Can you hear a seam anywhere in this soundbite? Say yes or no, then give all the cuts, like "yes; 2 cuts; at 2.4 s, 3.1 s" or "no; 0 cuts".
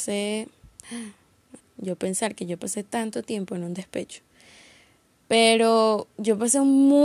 yes; 1 cut; at 1.6 s